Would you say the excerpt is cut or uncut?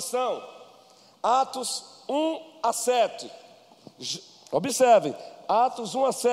uncut